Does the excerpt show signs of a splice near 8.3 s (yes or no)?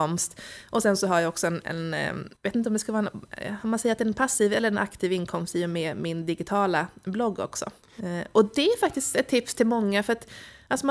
no